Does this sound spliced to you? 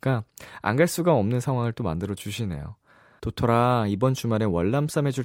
yes; 1 cut; at 3.2 s

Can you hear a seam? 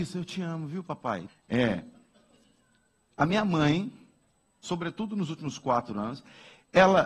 yes; 2 cuts; at 1.3 s, 4.6 s

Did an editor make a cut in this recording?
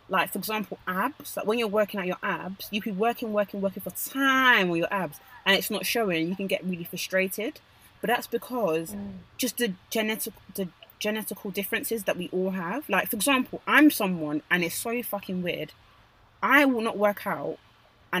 no; 0 cuts

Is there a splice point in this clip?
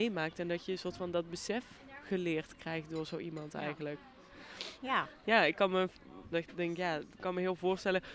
yes; 2 cuts; at 4.8 s, 6.3 s

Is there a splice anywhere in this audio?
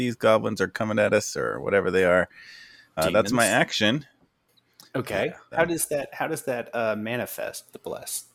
yes; 2 cuts; at 3.0 s, 5.5 s

